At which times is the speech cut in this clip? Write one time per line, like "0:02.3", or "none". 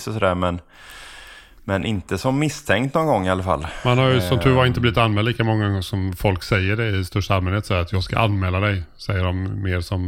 none